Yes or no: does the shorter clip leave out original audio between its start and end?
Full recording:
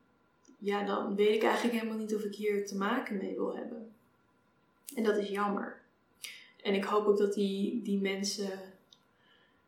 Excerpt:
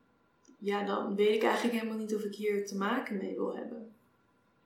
no